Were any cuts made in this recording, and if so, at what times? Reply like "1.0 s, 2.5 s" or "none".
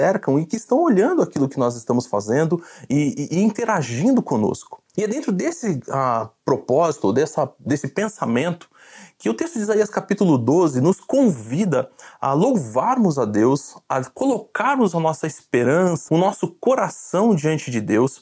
4.9 s, 16.1 s